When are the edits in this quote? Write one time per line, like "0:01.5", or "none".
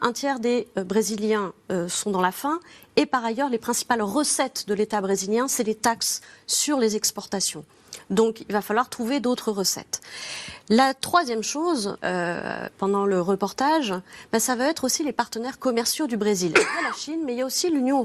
0:12.0